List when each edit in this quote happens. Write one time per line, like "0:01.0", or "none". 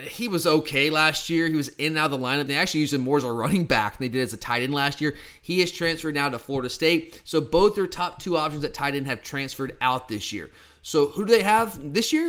0:02.5